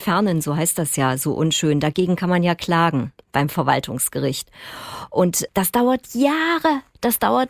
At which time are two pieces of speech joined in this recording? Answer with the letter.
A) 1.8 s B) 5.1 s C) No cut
C